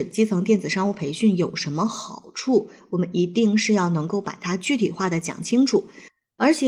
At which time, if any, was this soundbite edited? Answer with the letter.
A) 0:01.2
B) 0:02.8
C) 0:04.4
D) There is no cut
D